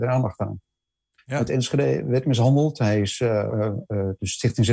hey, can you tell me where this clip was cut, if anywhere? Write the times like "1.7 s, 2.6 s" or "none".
1.2 s, 3.5 s